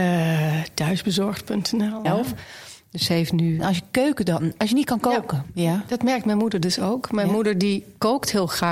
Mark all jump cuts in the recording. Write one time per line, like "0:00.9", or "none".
0:02.1
0:03.6